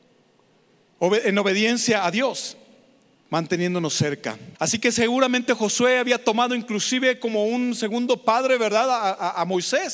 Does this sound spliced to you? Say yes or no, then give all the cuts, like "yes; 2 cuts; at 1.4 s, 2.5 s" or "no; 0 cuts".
yes; 2 cuts; at 3.1 s, 4.5 s